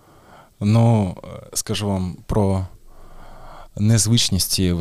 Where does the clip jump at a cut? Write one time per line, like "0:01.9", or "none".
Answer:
none